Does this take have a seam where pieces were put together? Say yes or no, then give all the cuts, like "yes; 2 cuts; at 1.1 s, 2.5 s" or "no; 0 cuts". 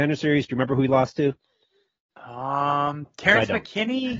no; 0 cuts